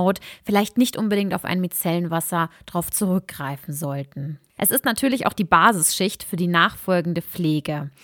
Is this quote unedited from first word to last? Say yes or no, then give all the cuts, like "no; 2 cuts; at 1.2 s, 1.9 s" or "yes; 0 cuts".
no; 1 cut; at 4.6 s